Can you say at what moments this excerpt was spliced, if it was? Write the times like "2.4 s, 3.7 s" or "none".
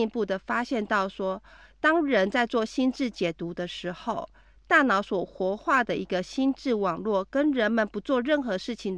none